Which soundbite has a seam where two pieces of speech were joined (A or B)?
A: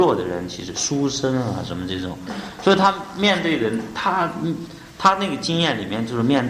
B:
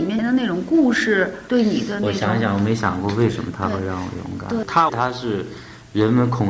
B